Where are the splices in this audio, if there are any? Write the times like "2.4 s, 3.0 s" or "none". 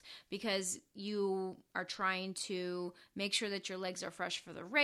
none